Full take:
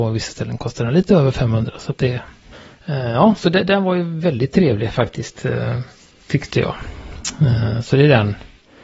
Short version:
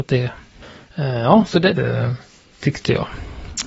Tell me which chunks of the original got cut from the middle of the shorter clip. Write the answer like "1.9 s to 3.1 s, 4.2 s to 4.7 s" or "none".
3.7 s to 5.4 s